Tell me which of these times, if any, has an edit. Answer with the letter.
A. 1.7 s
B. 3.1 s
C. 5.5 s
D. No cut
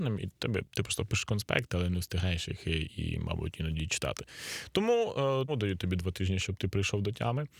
C